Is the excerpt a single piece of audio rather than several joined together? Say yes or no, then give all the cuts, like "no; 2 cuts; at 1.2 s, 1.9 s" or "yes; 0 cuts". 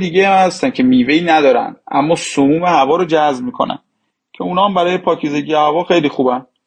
yes; 0 cuts